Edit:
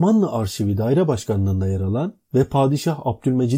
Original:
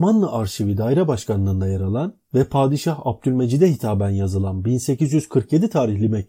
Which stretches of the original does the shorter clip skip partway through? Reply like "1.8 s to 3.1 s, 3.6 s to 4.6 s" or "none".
none